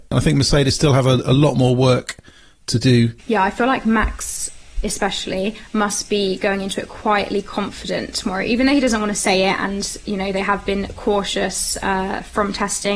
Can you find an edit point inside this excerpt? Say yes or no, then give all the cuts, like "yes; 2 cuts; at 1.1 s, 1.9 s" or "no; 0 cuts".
yes; 1 cut; at 3.2 s